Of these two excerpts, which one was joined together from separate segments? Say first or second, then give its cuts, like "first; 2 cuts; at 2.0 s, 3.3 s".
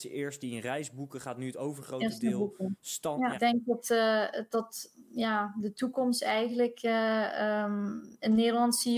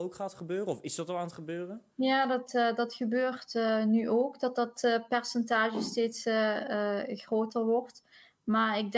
first; 1 cut; at 3.3 s